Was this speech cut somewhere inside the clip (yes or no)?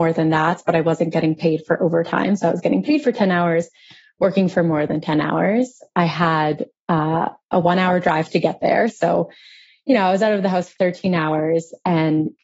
yes